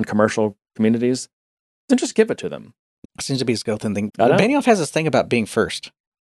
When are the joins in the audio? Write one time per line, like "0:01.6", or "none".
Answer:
0:03.0
0:04.1